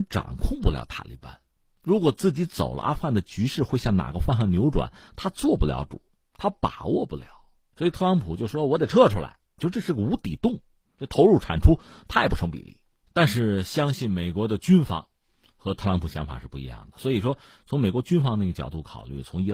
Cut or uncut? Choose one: cut